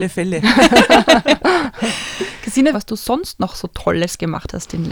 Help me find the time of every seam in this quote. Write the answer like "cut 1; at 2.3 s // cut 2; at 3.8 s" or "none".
cut 1; at 2.7 s